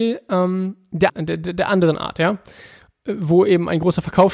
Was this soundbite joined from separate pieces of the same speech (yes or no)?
yes